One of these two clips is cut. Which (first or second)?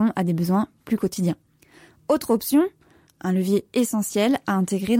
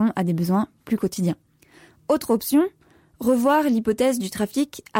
first